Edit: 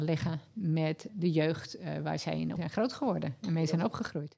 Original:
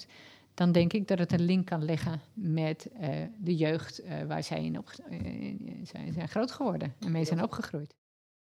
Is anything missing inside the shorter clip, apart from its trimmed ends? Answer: yes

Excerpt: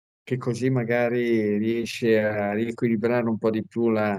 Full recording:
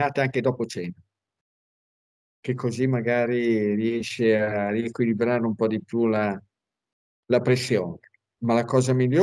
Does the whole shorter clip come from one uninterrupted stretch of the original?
yes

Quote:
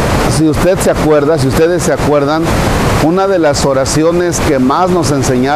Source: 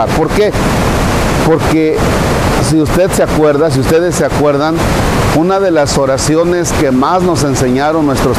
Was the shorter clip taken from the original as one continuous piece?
yes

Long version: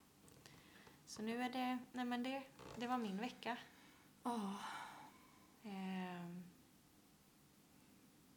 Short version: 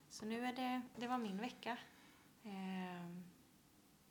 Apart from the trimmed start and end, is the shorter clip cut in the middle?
yes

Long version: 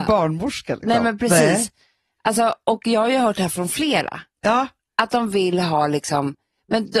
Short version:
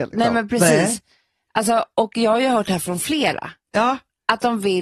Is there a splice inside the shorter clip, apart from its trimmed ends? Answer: no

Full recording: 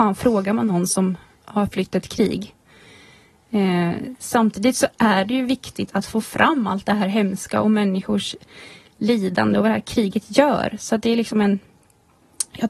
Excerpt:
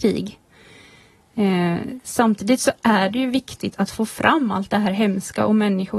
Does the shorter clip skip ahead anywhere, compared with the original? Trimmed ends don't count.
no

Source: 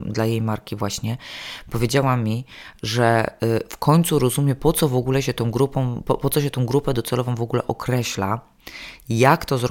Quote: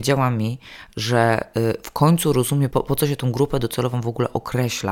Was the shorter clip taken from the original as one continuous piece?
no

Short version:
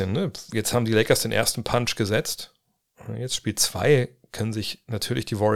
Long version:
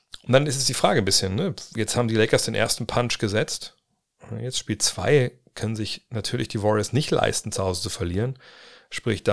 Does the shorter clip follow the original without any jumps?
yes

